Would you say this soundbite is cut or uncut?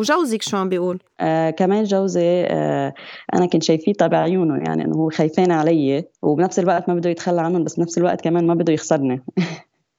cut